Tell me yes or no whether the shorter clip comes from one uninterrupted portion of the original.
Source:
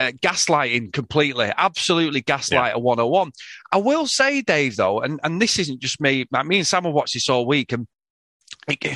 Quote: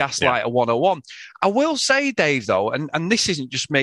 yes